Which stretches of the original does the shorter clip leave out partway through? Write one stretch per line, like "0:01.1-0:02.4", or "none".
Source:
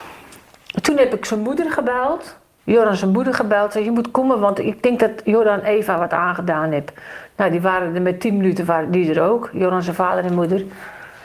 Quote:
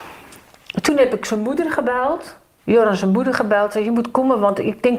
none

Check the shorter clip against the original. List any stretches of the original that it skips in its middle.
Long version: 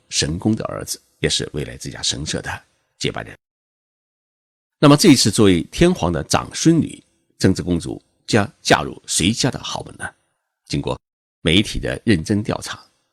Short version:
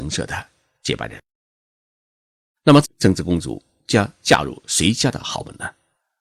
0:05.0-0:07.2

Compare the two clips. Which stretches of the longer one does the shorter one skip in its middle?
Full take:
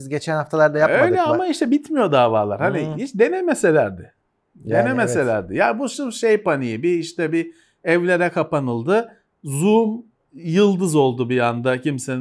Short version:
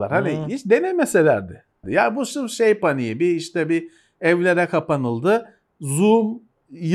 0:04.3-0:05.5

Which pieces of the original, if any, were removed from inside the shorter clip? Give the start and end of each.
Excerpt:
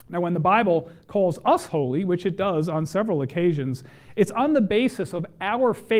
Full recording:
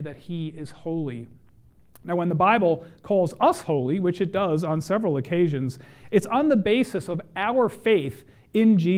none

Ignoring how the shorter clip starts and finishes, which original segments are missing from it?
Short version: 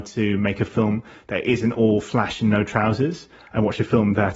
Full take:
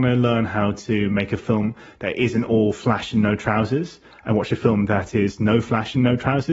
none

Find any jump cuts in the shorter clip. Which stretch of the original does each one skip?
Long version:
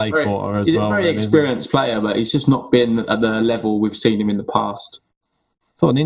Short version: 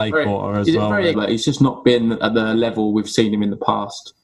0:01.1-0:02.0

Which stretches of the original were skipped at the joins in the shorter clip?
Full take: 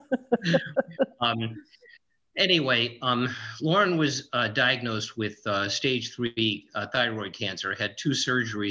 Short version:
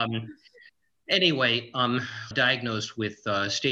0:03.6-0:04.5

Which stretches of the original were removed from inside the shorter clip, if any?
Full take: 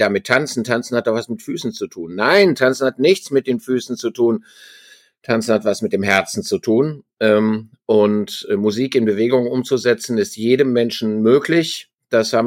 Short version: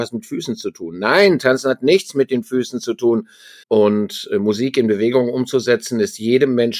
0:04.8-0:07.8

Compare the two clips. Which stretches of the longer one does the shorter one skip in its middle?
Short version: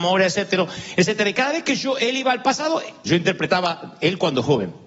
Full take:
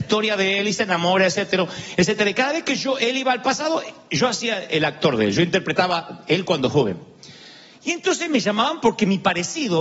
0:04.1-0:05.3

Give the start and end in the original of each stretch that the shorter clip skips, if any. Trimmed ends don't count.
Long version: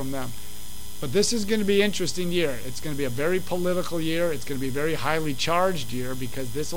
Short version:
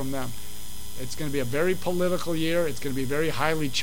0:01.0-0:02.6

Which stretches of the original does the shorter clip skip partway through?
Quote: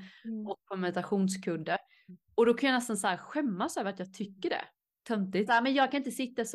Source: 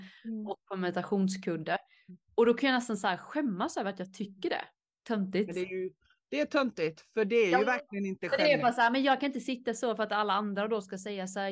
0:05.5-0:08.8

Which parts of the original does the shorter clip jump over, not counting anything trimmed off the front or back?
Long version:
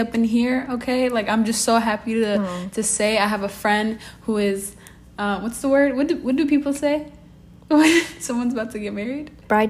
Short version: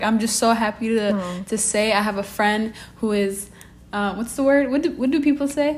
none

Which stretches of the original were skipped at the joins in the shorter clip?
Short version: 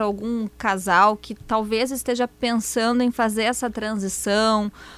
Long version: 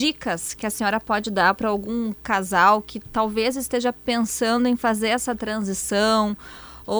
none

